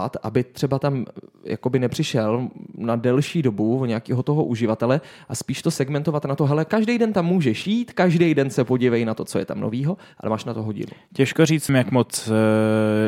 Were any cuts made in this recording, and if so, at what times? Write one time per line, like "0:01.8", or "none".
0:11.7